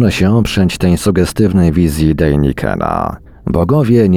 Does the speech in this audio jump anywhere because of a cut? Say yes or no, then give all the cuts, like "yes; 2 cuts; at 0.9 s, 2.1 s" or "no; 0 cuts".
no; 0 cuts